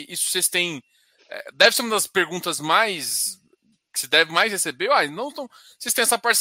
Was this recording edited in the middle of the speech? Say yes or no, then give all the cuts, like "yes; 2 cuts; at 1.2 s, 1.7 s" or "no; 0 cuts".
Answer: no; 0 cuts